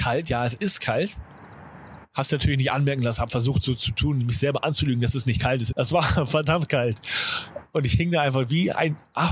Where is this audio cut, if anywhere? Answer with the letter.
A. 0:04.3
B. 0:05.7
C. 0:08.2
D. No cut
B